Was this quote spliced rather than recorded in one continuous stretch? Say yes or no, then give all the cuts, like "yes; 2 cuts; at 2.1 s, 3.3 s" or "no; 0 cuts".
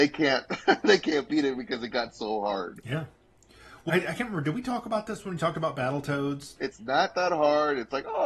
yes; 2 cuts; at 3.9 s, 6.6 s